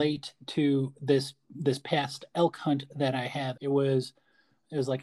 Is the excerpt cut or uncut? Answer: cut